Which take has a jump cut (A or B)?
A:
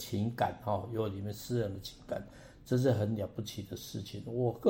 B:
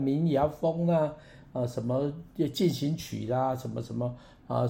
A